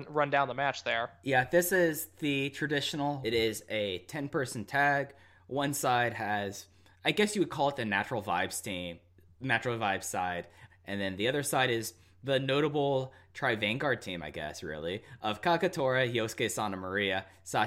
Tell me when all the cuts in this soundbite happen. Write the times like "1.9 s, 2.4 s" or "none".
3.2 s, 10.7 s